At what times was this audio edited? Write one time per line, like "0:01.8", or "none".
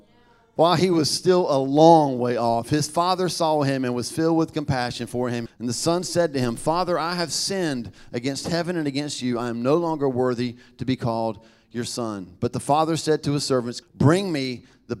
0:05.5
0:13.8